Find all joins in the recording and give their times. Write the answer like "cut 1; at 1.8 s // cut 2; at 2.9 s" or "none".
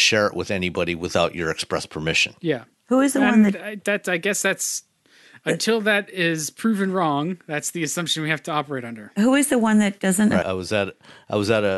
cut 1; at 10.4 s

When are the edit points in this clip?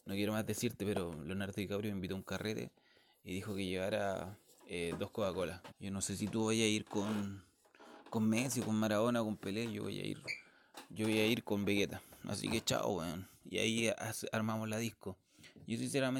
cut 1; at 5.7 s // cut 2; at 13.3 s

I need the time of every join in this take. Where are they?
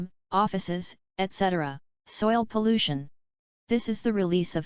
cut 1; at 2.0 s

